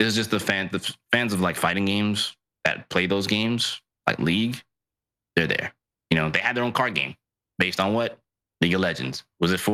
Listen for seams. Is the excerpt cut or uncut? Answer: uncut